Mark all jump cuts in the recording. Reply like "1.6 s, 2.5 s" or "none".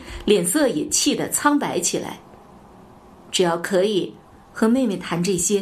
4.3 s